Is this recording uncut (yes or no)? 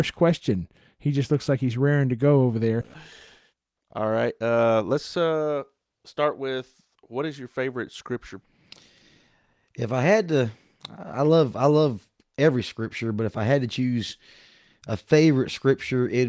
yes